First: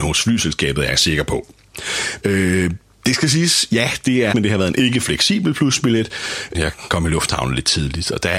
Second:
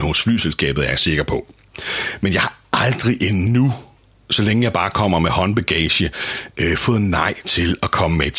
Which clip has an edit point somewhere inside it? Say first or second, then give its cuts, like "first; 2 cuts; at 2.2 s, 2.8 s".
first; 3 cuts; at 2.2 s, 4.3 s, 6.5 s